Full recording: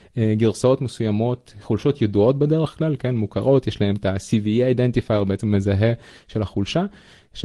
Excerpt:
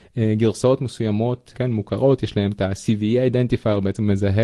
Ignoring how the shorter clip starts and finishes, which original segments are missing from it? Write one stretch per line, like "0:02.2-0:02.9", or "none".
0:01.5-0:03.0

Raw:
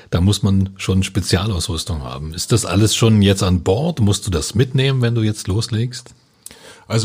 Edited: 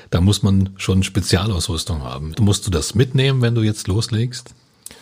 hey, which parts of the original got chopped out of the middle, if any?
0:02.3-0:03.9

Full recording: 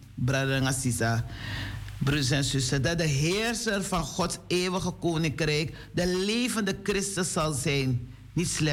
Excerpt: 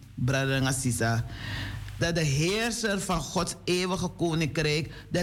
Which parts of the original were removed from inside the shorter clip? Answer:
0:02.0-0:02.8

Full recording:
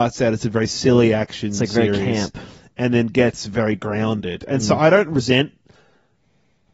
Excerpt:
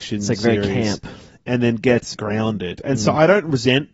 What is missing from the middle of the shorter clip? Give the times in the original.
0:03.4-0:03.8

